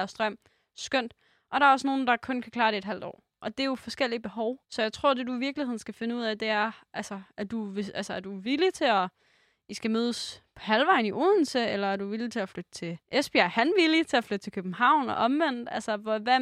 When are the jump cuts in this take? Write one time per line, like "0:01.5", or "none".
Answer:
0:04.6
0:13.0